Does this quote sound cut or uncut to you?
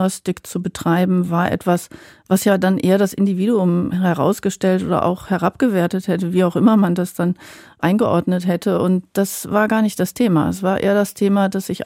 uncut